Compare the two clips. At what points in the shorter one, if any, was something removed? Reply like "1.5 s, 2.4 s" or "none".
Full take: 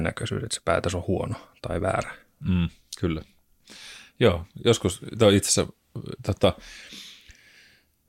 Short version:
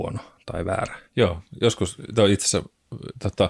1.1 s